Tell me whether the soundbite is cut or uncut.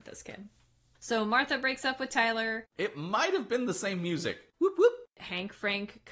cut